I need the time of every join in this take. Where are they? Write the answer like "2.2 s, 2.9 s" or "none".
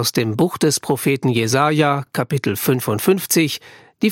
none